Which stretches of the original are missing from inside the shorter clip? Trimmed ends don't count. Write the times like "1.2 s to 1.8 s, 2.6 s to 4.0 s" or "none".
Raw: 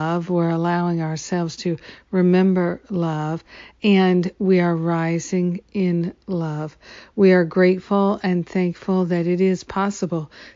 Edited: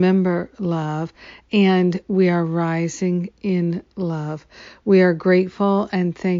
none